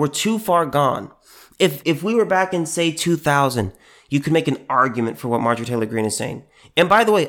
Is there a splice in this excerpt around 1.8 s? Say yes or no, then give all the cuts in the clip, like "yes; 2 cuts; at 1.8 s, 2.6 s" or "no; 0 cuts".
yes; 1 cut; at 1.8 s